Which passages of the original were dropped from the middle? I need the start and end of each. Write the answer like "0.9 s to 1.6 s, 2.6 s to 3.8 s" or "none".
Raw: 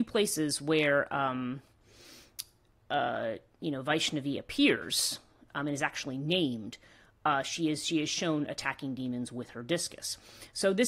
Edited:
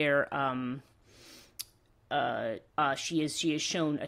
3.5 s to 7.2 s